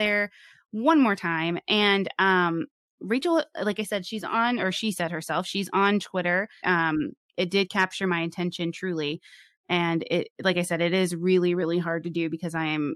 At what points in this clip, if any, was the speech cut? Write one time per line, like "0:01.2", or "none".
0:06.6